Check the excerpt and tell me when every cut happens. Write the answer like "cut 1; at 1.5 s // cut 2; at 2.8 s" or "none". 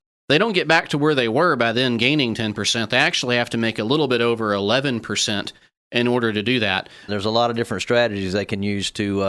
cut 1; at 7.1 s